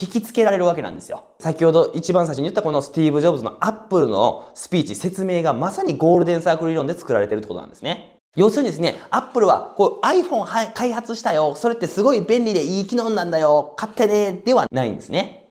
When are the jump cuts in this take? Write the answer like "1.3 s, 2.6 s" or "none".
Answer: none